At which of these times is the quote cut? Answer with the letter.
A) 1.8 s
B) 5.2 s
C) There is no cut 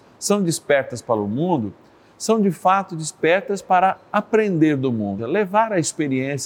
B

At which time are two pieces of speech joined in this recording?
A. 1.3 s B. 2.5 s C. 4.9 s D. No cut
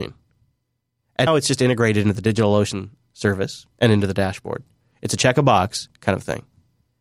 A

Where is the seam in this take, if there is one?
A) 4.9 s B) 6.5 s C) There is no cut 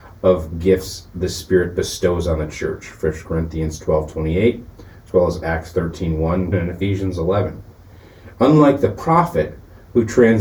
B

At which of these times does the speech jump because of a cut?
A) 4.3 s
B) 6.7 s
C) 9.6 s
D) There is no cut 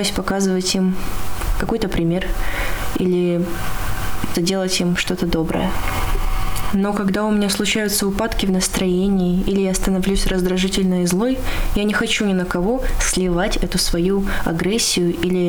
A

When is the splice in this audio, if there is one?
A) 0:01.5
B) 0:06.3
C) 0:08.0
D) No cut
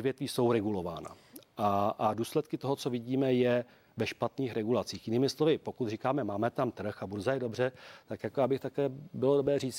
D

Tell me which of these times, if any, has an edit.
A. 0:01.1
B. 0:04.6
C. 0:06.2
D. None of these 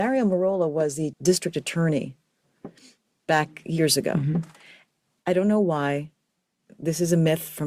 A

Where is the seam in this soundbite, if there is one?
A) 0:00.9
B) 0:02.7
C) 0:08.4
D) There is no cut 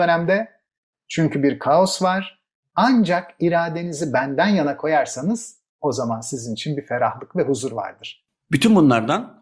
D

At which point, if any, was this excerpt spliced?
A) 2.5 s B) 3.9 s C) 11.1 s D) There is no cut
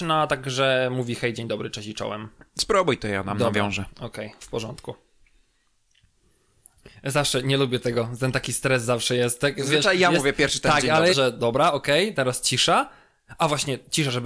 C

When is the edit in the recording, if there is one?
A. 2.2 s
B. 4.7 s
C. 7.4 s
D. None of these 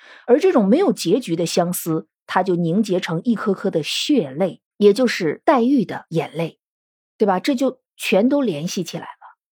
B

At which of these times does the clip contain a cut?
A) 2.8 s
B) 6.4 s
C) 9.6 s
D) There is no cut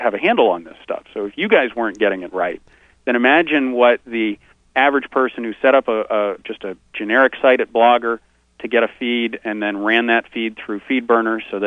B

